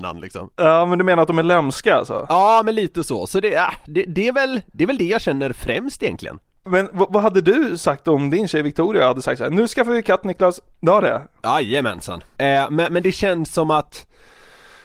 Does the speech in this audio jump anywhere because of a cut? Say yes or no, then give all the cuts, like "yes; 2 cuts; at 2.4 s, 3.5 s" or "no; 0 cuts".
yes; 2 cuts; at 10.8 s, 12.4 s